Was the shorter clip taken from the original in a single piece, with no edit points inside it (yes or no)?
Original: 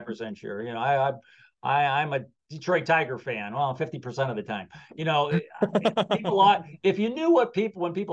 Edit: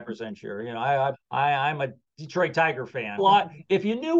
no